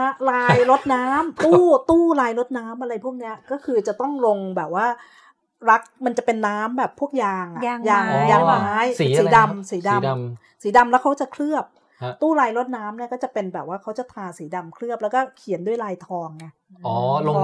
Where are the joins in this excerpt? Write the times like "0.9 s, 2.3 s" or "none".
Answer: 1.4 s